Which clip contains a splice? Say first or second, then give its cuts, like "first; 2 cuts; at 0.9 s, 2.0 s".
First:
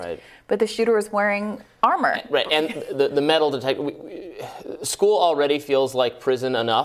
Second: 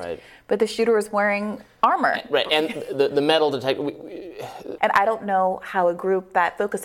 second; 1 cut; at 4.8 s